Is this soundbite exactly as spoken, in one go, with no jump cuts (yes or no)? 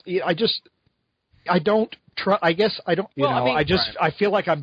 no